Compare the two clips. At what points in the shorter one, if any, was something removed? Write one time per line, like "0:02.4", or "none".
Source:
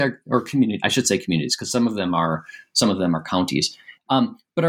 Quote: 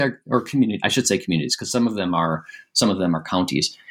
none